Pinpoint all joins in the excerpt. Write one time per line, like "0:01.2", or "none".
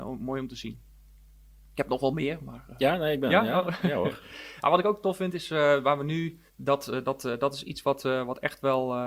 0:06.5